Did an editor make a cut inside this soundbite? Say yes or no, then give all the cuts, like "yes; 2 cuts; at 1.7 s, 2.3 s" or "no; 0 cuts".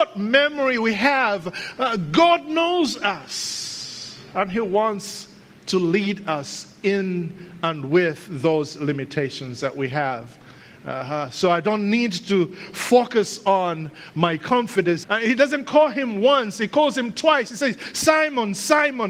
yes; 1 cut; at 15.0 s